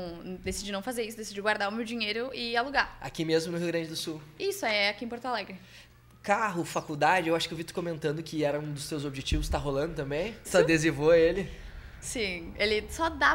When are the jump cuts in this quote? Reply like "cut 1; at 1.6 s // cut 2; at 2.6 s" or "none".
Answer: cut 1; at 10.4 s // cut 2; at 12.0 s